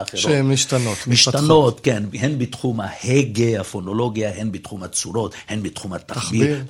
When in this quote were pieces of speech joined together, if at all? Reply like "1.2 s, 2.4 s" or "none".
none